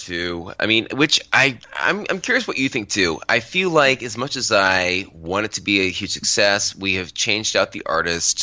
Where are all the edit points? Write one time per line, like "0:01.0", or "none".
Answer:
0:01.6